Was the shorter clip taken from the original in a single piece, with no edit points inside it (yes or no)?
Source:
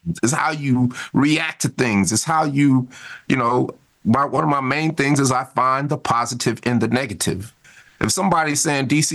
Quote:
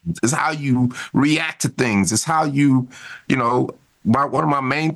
yes